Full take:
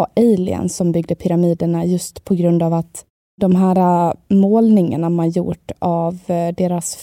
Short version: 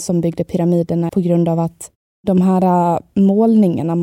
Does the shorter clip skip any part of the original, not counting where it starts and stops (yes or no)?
yes